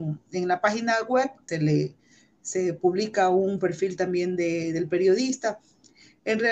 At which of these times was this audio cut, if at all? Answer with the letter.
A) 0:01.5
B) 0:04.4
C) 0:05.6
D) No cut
A